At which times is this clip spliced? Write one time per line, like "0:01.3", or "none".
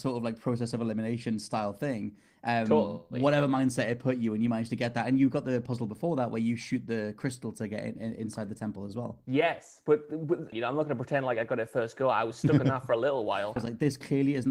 0:10.5
0:13.6